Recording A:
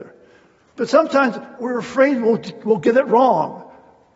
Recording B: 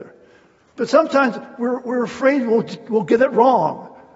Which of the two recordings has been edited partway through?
A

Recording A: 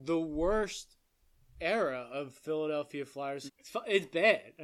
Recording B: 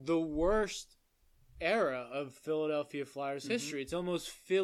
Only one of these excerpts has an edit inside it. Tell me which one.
A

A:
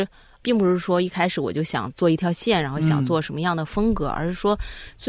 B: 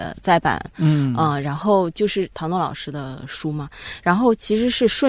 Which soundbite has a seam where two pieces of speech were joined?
A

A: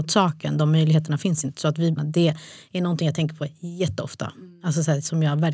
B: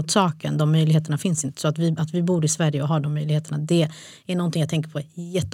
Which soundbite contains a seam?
A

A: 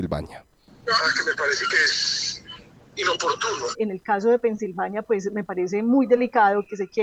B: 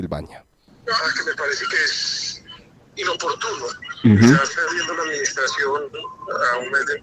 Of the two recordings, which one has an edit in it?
A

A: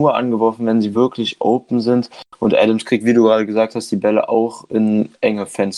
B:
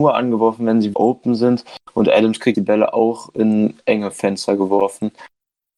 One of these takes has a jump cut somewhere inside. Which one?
B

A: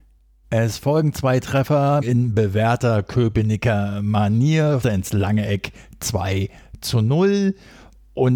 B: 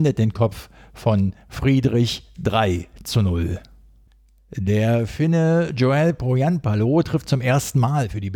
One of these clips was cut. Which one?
A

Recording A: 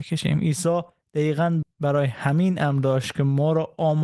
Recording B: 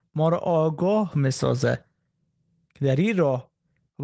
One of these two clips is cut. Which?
A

